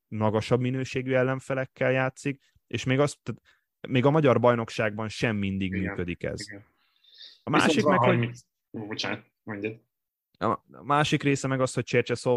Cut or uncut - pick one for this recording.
uncut